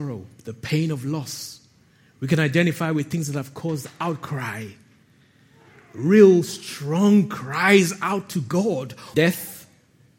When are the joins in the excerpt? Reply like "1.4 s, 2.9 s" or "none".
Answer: 9.1 s